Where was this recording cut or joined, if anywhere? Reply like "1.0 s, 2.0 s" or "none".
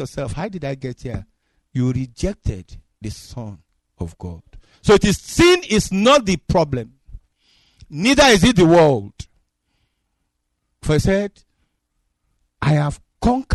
none